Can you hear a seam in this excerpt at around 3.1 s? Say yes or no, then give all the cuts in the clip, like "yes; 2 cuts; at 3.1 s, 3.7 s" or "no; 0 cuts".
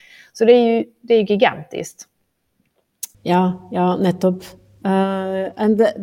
yes; 1 cut; at 3.1 s